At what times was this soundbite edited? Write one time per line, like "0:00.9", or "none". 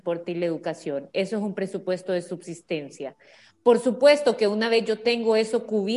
none

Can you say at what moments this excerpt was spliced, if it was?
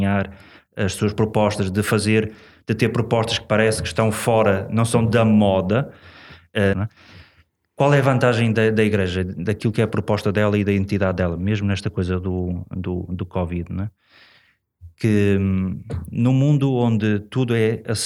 0:06.7

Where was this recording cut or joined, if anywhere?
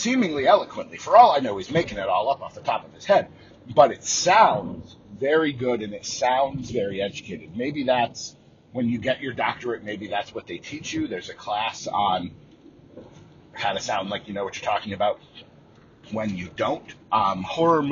0:17.0

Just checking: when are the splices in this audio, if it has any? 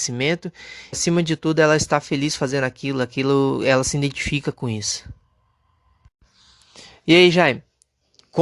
0:00.9

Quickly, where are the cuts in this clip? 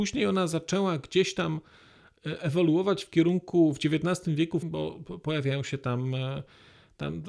0:04.6

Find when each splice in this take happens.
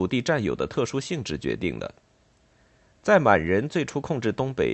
none

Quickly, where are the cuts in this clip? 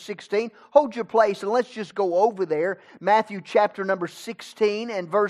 none

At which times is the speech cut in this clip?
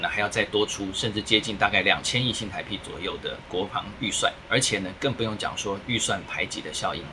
0:04.4

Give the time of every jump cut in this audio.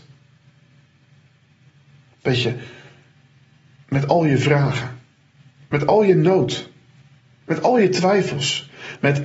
none

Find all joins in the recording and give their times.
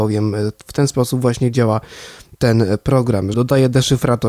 0:03.3

